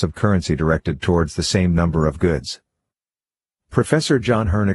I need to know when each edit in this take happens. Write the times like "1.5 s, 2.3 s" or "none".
none